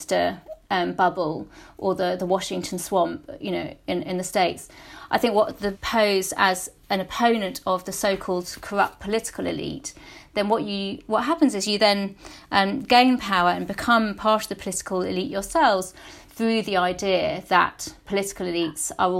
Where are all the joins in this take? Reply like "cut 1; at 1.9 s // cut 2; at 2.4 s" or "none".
cut 1; at 5.7 s // cut 2; at 16.3 s